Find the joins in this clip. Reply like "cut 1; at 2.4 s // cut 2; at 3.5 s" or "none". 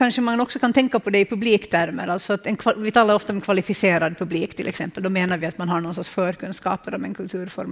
none